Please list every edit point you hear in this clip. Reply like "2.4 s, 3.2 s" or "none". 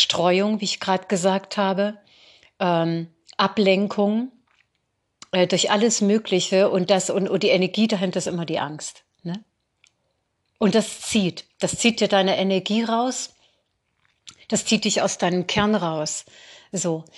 none